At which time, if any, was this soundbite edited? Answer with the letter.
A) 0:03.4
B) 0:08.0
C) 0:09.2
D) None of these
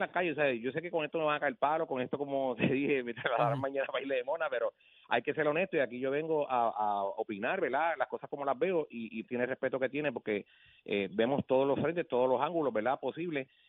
C